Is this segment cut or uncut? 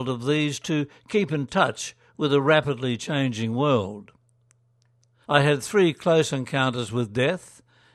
cut